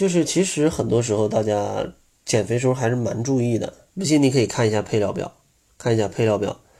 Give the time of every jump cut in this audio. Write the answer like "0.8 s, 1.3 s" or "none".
3.9 s